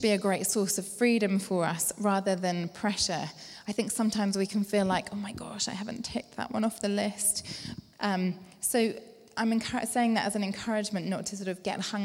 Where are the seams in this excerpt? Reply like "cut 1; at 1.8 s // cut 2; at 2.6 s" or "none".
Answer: cut 1; at 7.9 s

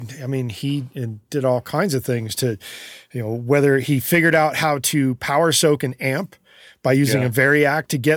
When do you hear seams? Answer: none

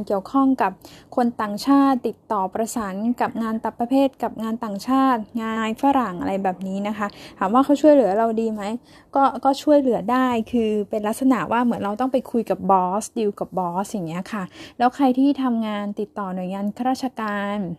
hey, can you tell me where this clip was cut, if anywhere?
cut 1; at 5.6 s

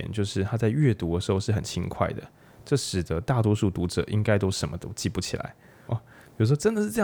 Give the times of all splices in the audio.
cut 1; at 5.9 s

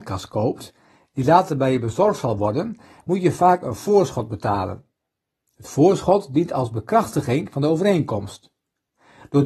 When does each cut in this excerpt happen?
none

